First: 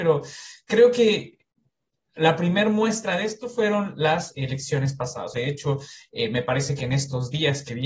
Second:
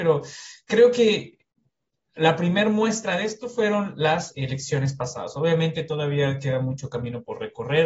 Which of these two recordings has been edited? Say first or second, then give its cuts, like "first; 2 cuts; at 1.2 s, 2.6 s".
first; 1 cut; at 5.3 s